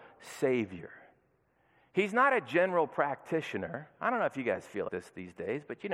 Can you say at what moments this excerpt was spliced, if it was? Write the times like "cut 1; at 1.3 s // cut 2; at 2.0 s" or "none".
cut 1; at 4.9 s

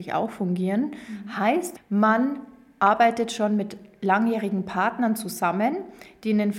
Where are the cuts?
cut 1; at 1.8 s

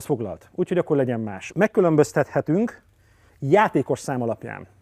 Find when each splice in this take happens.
cut 1; at 1.5 s

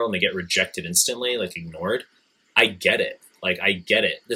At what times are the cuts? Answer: none

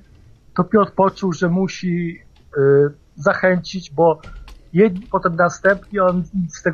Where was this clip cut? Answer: cut 1; at 5.1 s

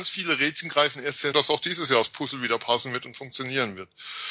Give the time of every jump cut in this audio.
cut 1; at 1.3 s

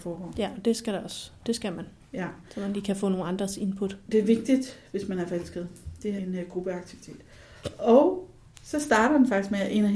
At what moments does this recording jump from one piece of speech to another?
cut 1; at 6.2 s

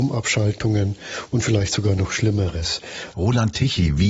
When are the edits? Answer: cut 1; at 3.1 s

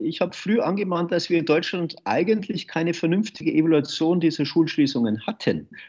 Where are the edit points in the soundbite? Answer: none

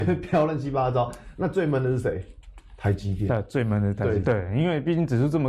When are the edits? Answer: cut 1; at 4.2 s

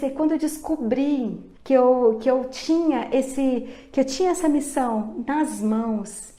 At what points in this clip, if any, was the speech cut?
cut 1; at 1.6 s

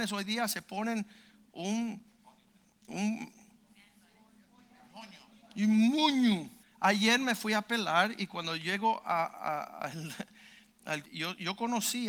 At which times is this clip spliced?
cut 1; at 6.6 s // cut 2; at 11.0 s

